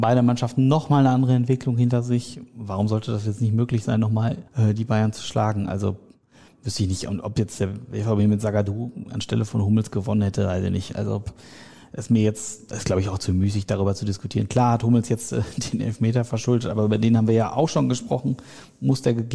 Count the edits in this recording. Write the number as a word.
one